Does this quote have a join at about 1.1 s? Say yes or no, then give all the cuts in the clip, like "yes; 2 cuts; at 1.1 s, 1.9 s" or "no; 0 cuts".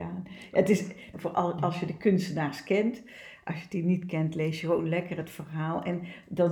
yes; 1 cut; at 1.1 s